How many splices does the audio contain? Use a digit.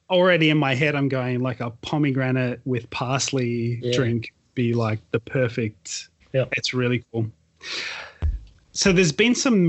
1